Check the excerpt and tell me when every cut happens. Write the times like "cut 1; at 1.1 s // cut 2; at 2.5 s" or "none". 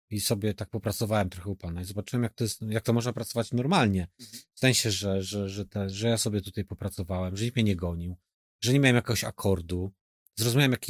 none